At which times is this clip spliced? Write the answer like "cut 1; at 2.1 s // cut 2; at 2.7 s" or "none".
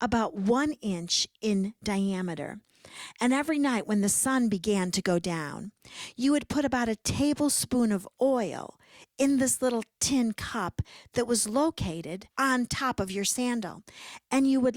cut 1; at 12.3 s